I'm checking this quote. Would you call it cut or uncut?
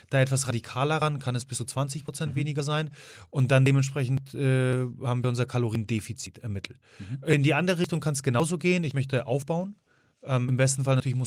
uncut